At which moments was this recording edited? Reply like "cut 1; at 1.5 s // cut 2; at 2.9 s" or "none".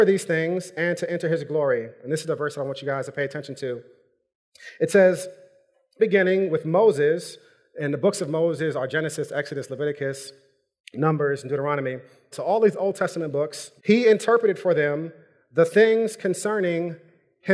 cut 1; at 6.0 s // cut 2; at 12.3 s // cut 3; at 13.8 s